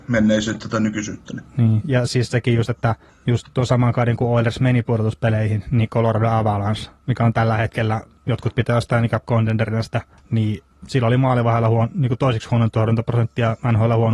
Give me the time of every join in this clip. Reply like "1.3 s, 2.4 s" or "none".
none